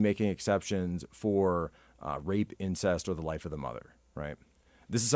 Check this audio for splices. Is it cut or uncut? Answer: uncut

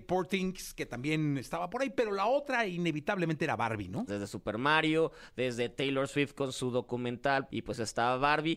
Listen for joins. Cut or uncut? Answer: cut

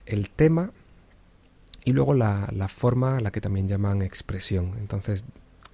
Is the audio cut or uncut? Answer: uncut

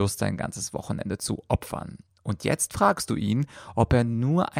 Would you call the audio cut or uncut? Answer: uncut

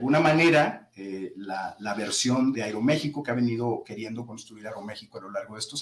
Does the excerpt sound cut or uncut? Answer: cut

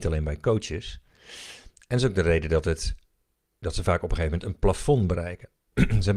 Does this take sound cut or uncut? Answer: uncut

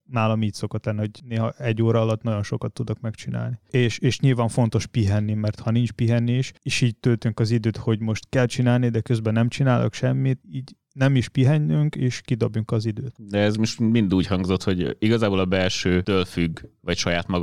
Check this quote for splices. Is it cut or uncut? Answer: cut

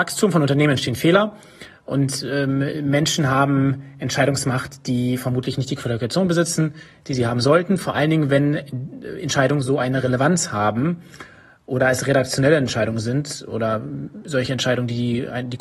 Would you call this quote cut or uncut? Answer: uncut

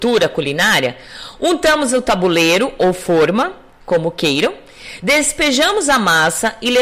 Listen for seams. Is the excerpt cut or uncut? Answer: uncut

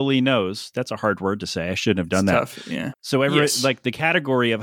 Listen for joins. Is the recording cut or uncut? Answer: cut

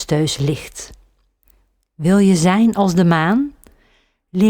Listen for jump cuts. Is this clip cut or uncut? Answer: uncut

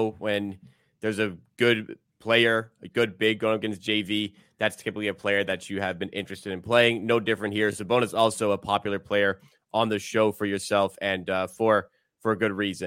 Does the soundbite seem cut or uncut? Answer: uncut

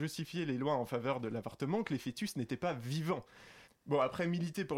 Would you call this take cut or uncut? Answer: cut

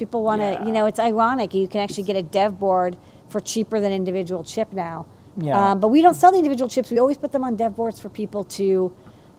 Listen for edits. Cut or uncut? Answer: uncut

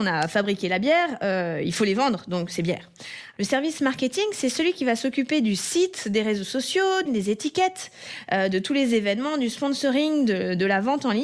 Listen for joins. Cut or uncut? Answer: cut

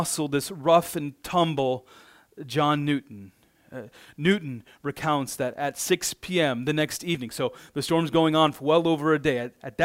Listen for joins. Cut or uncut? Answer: uncut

